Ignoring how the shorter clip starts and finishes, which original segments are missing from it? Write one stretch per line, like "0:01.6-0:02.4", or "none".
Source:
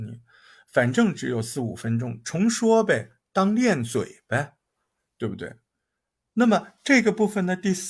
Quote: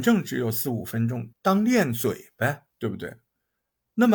0:02.2-0:03.2
0:04.6-0:05.1